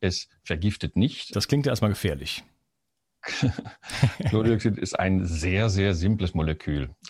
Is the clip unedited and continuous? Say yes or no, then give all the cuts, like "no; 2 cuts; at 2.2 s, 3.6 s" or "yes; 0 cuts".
no; 1 cut; at 1.3 s